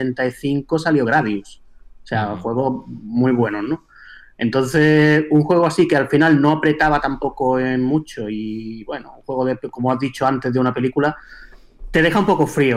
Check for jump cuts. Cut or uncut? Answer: uncut